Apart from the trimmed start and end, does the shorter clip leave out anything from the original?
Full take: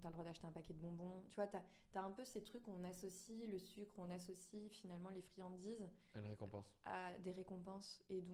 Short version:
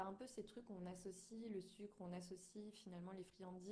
no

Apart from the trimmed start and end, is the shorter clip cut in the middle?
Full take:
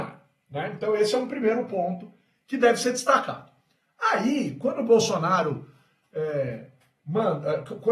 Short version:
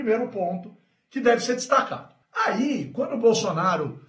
yes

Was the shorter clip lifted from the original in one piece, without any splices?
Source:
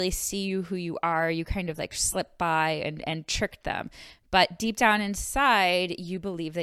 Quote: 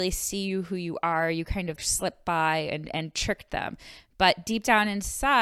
no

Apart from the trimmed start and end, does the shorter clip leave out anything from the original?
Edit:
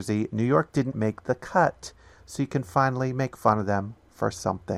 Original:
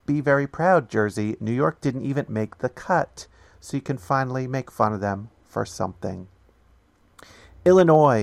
yes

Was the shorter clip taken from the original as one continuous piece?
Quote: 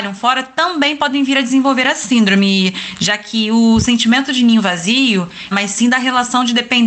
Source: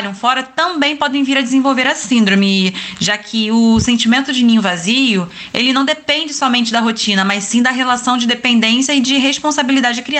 no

